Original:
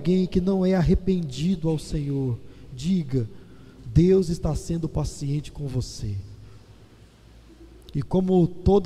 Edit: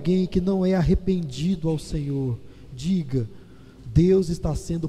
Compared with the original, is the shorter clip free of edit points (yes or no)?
yes